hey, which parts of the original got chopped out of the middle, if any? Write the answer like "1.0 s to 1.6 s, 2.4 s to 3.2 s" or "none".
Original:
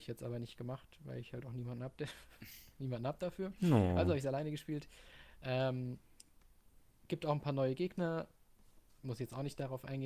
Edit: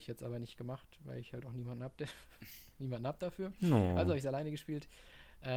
none